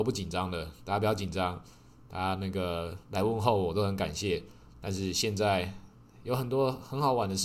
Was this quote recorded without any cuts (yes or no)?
yes